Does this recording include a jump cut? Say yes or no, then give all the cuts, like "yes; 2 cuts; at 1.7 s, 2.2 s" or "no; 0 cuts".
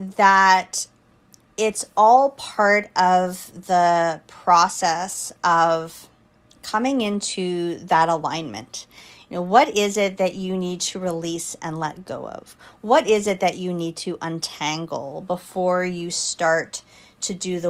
no; 0 cuts